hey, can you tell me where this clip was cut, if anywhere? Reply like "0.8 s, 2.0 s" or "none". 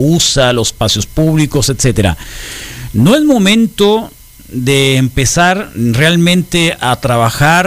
none